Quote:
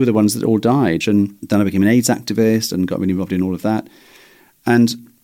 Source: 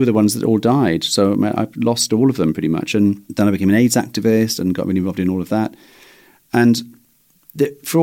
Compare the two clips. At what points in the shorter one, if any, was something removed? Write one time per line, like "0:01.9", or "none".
0:01.0